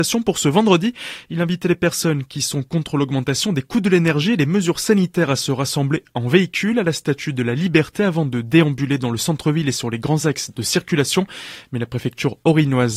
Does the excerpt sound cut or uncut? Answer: uncut